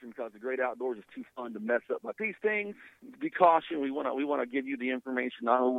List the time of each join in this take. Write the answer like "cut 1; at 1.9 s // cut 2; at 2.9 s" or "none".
cut 1; at 3.1 s